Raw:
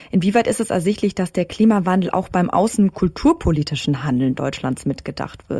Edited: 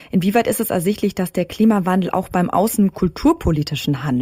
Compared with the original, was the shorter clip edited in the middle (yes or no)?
no